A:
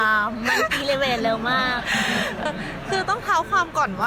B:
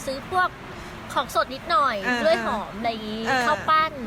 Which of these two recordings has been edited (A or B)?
A